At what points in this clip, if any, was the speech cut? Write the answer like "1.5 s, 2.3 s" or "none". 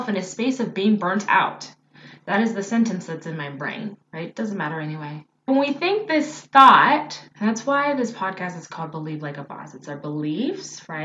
4.0 s, 5.5 s, 7.3 s